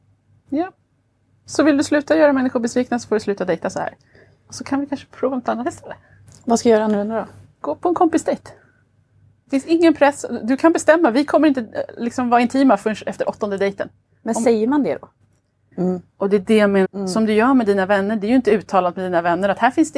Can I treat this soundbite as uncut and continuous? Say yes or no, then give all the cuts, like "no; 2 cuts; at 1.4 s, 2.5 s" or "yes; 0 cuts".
no; 2 cuts; at 15.7 s, 16.8 s